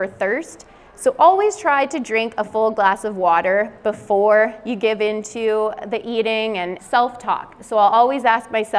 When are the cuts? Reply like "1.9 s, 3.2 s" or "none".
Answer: 6.8 s